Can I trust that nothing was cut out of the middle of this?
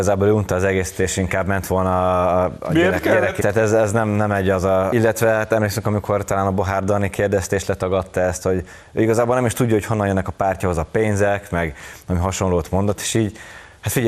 no; 2 cuts; at 3.4 s, 4.9 s

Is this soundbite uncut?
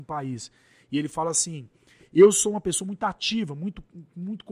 yes; 0 cuts

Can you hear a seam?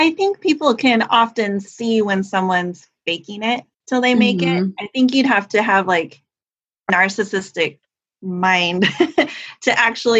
yes; 2 cuts; at 3.7 s, 6.9 s

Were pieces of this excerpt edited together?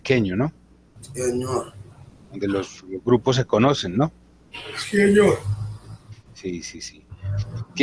no; 0 cuts

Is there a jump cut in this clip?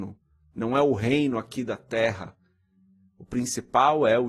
no; 0 cuts

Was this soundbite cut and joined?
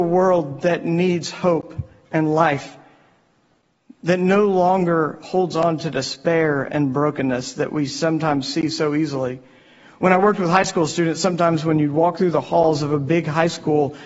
no; 0 cuts

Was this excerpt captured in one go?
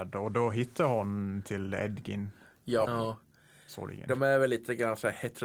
no; 1 cut; at 2.8 s

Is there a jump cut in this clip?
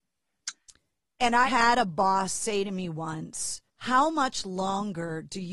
yes; 2 cuts; at 1.4 s, 3.7 s

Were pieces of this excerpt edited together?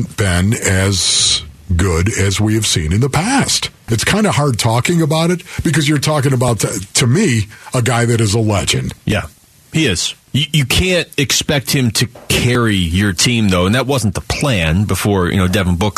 yes; 2 cuts; at 3.9 s, 9.0 s

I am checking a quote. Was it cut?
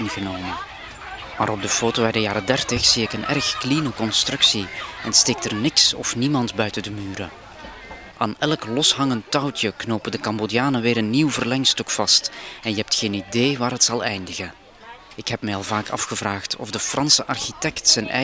yes; 1 cut; at 8.1 s

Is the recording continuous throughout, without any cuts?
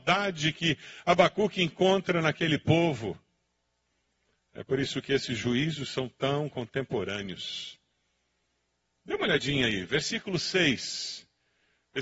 yes; 0 cuts

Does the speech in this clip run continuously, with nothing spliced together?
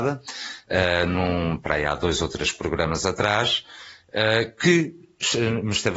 yes; 0 cuts

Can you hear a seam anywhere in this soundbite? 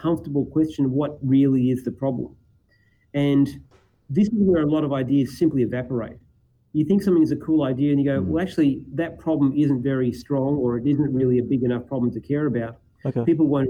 no; 0 cuts

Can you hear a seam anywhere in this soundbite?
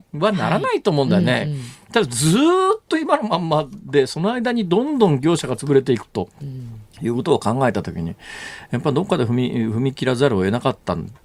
no; 0 cuts

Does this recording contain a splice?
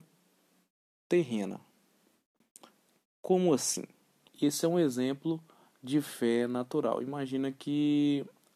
yes; 1 cut; at 4.3 s

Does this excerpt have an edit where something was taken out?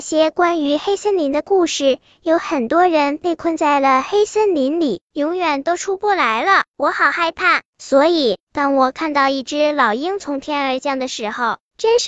no; 0 cuts

